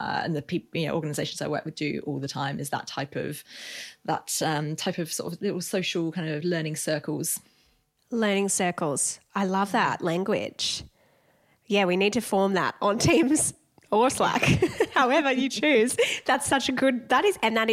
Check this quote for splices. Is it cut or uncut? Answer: uncut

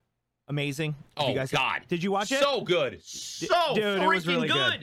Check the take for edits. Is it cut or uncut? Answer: uncut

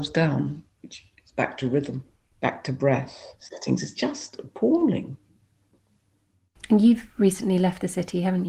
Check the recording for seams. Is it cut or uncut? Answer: cut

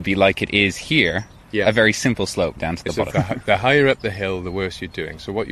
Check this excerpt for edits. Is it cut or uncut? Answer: cut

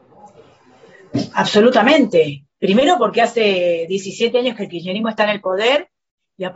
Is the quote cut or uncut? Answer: uncut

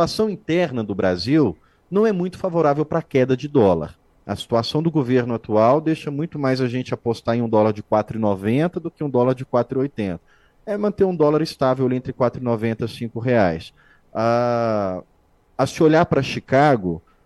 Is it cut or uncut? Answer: uncut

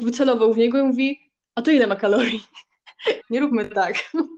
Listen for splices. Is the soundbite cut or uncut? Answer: cut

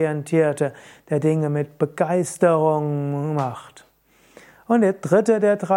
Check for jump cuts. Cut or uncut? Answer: uncut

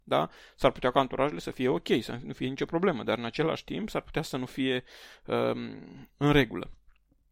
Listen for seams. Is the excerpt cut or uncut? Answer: uncut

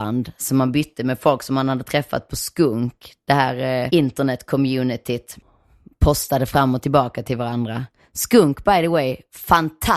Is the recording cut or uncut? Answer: cut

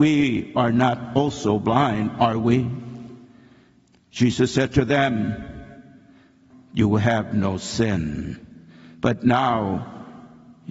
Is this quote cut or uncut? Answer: cut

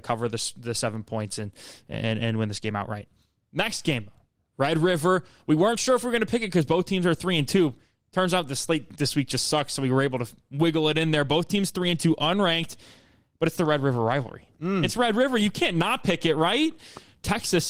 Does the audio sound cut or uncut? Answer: uncut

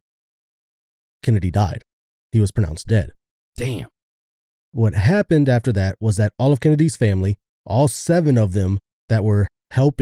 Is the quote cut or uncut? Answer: uncut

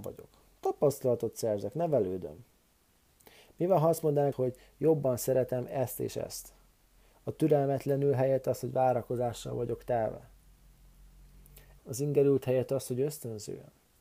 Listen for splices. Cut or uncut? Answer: cut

